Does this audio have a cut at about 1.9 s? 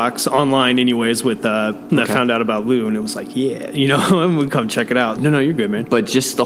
yes; 2 cuts; at 1.9 s, 5.2 s

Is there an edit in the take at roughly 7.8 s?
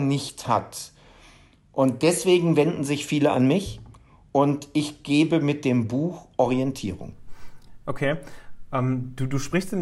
no; 0 cuts

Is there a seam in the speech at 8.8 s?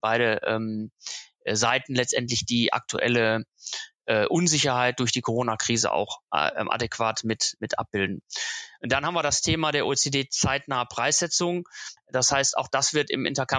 no; 1 cut; at 12.0 s

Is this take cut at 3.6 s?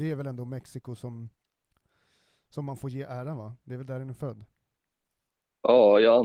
no; 0 cuts

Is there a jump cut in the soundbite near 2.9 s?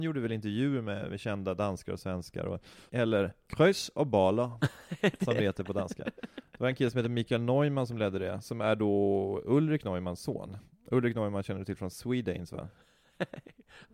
yes; 1 cut; at 2.9 s

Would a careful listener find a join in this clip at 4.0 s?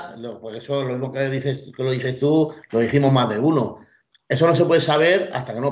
no; 0 cuts

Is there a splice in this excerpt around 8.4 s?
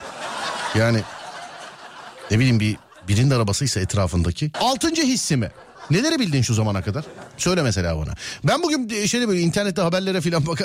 no; 1 cut; at 4.5 s

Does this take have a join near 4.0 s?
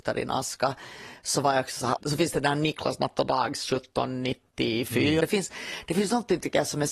no; 2 cuts; at 2.0 s, 5.2 s

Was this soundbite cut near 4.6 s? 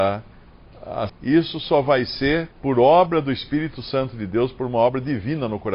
no; 2 cuts; at 1.1 s, 2.5 s

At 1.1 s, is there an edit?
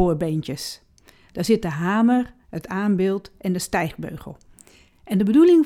no; 1 cut; at 2.4 s

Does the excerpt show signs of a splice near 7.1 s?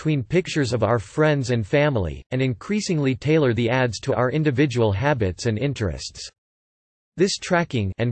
no; 1 cut; at 2.2 s

